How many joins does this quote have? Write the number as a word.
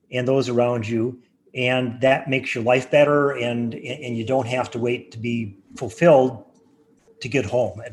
zero